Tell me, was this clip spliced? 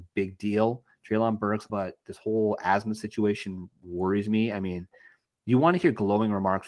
yes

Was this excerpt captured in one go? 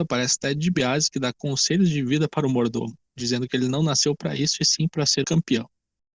no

